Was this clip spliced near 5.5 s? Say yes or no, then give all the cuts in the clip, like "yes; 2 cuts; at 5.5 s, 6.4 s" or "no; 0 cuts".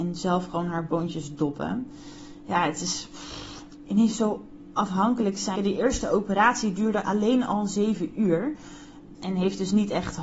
yes; 2 cuts; at 5.5 s, 9.2 s